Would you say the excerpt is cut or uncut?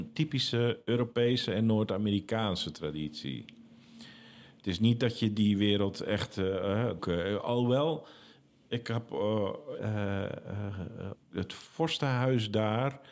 cut